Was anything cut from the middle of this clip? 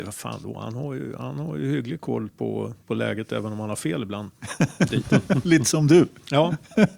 no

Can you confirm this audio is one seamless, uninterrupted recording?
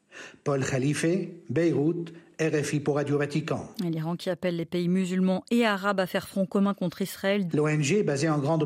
no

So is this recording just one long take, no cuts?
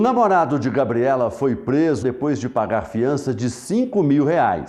no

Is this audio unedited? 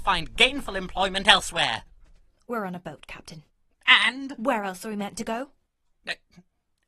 yes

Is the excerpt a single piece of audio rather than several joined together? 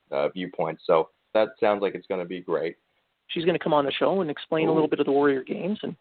no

